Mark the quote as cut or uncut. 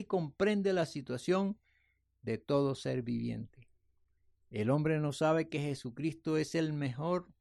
uncut